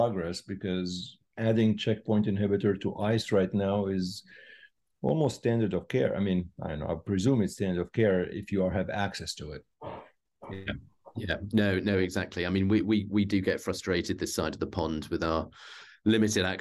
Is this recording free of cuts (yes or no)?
yes